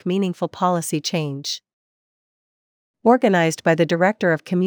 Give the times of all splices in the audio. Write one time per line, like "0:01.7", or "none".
none